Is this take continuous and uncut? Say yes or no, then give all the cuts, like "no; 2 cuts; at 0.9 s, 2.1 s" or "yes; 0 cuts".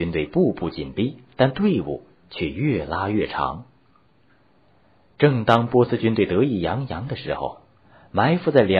yes; 0 cuts